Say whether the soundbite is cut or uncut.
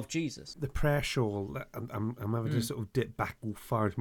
uncut